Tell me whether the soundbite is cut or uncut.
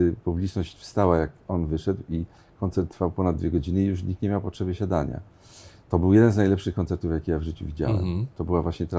uncut